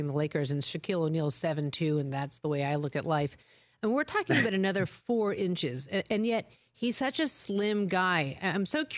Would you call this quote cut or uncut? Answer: uncut